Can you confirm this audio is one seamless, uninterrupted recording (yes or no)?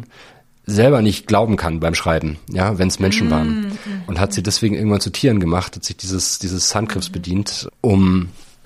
yes